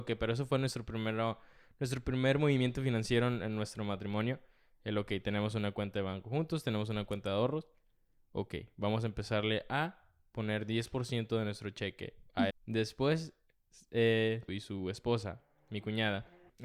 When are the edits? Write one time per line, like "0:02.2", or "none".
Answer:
0:12.5
0:14.5